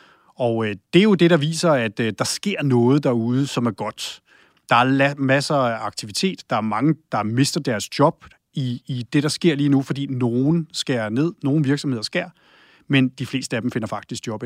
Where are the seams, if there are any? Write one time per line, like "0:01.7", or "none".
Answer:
none